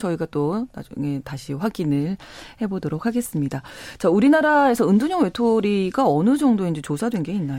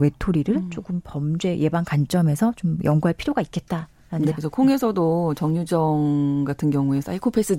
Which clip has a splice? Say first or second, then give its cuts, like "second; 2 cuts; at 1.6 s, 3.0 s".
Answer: second; 1 cut; at 4.3 s